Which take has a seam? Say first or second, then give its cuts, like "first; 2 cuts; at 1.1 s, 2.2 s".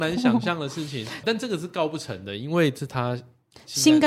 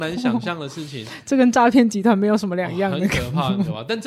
first; 1 cut; at 1.2 s